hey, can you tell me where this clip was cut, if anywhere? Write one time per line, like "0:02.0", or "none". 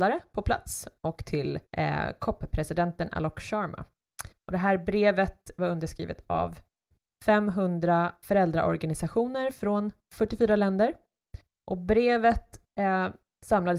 0:01.7